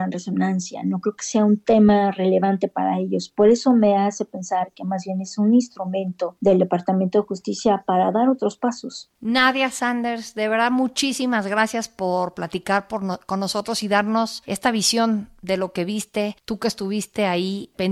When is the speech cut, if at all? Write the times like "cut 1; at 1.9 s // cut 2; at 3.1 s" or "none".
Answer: none